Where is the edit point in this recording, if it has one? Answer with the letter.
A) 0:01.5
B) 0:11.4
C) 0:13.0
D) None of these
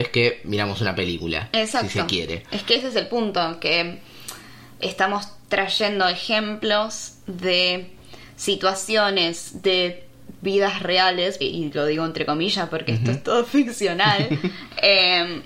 B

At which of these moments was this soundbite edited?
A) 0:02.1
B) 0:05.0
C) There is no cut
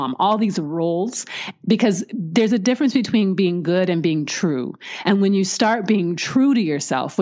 C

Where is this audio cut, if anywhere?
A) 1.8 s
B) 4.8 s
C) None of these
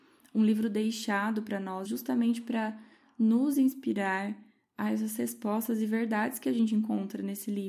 A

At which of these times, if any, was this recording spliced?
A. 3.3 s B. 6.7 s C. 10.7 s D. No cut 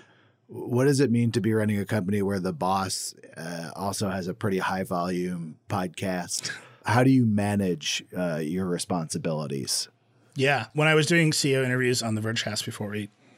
D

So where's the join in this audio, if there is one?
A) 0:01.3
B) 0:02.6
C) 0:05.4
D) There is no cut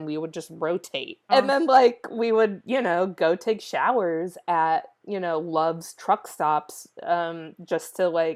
A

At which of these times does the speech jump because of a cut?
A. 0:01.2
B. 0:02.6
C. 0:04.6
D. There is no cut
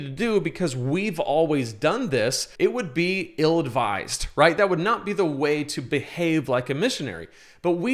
B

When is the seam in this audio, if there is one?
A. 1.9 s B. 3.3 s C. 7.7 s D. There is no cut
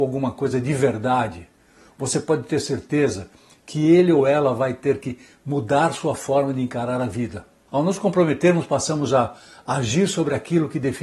C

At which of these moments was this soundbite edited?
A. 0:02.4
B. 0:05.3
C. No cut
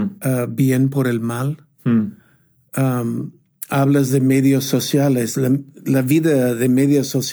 C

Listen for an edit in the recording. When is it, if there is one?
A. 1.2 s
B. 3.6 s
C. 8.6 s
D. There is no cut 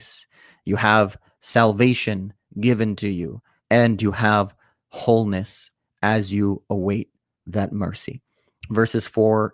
B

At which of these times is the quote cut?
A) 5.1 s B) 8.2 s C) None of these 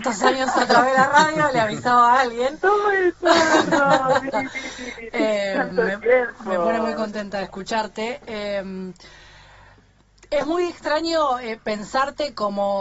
C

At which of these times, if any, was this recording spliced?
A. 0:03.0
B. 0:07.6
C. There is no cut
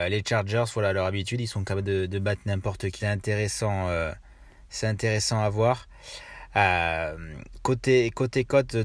A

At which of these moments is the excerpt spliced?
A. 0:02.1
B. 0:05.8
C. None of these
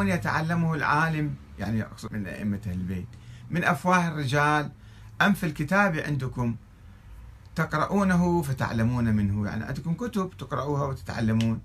A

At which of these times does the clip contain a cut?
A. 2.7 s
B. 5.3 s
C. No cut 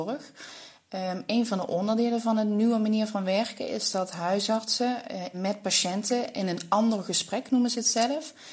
B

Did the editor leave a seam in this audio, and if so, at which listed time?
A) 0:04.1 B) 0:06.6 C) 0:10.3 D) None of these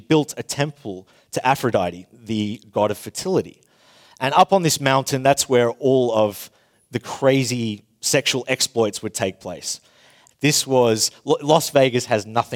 C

